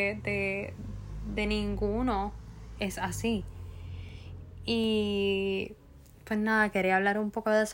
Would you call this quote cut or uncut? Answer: uncut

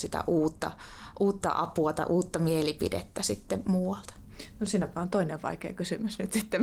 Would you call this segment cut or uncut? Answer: uncut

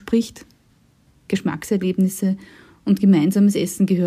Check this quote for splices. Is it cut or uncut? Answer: uncut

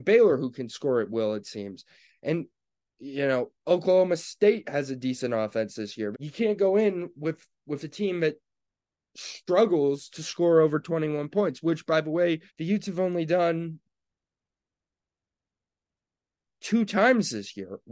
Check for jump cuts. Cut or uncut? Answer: cut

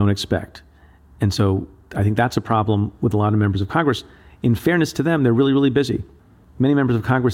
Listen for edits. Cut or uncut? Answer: uncut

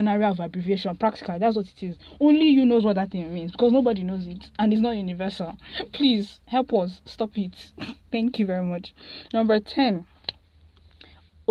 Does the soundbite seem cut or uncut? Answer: uncut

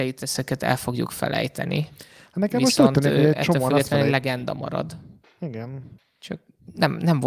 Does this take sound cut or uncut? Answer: uncut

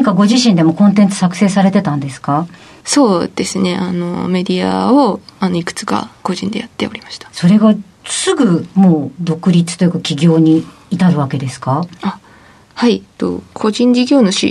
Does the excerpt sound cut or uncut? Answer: cut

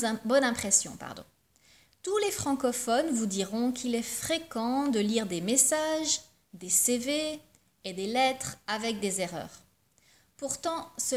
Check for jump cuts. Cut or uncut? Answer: uncut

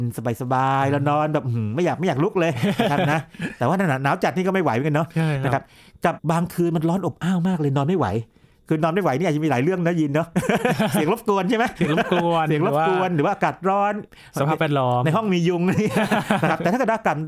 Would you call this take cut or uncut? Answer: cut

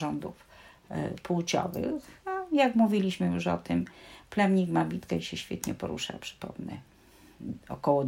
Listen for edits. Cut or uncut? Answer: uncut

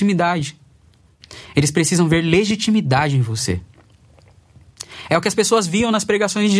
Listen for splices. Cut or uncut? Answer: uncut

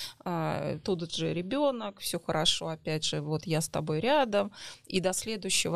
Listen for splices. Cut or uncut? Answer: uncut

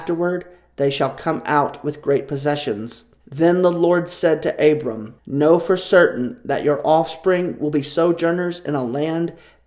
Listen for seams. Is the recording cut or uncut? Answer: cut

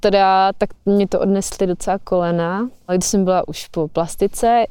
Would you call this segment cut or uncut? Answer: cut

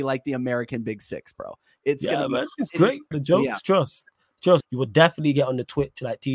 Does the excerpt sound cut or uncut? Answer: cut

